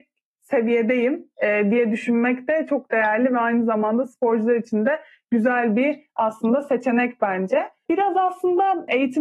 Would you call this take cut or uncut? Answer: uncut